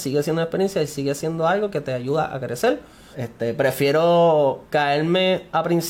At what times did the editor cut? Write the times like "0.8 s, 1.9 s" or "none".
3.1 s